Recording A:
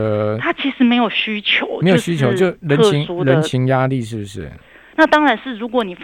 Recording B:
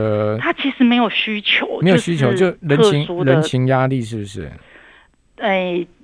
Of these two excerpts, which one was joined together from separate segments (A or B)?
A